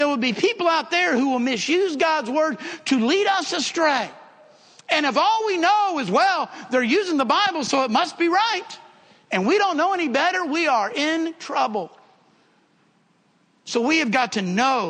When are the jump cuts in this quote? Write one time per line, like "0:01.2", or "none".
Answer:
none

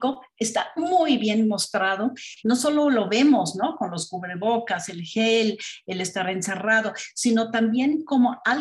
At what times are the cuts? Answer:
0:02.4

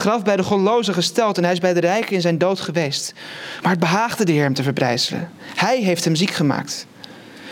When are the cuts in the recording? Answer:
0:03.6

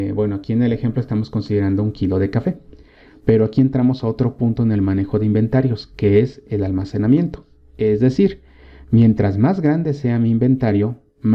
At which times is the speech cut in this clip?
none

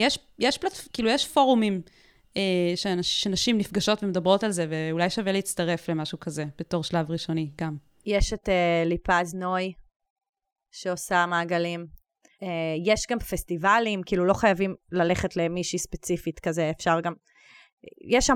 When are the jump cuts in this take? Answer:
none

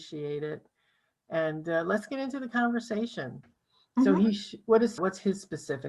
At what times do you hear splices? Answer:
0:03.4
0:05.0

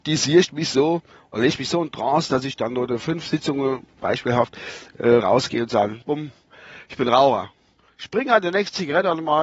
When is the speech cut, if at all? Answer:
0:06.0

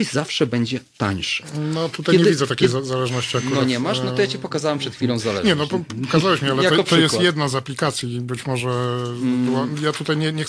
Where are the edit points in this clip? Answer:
none

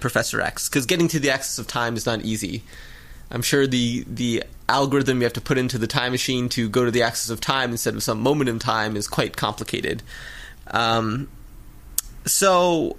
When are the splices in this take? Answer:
0:10.7

